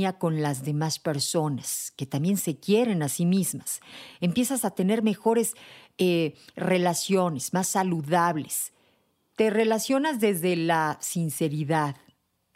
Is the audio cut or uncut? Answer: uncut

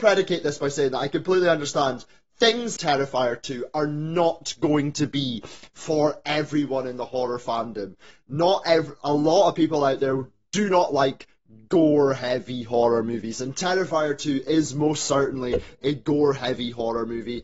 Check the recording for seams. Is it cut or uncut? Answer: cut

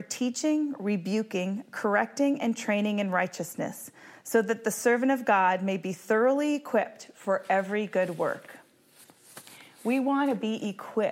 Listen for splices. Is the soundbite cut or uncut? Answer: uncut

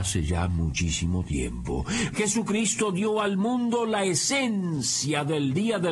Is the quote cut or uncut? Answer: cut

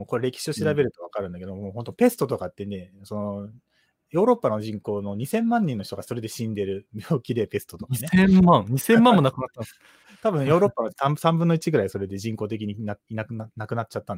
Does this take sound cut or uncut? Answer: uncut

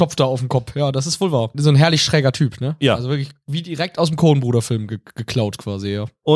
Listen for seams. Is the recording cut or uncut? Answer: uncut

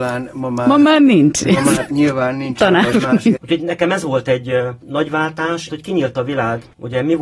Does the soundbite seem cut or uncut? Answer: cut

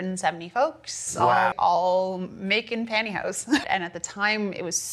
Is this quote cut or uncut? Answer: cut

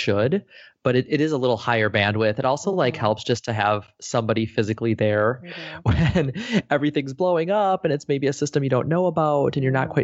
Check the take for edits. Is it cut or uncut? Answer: uncut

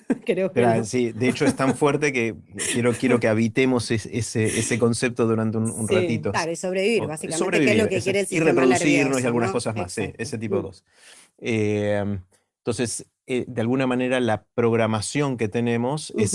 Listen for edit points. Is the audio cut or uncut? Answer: cut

